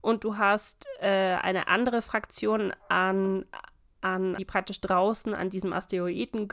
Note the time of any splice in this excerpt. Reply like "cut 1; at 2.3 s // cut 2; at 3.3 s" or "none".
cut 1; at 4.4 s